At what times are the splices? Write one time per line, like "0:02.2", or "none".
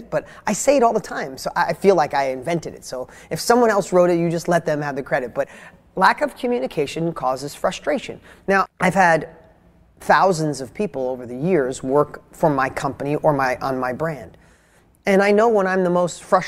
0:08.7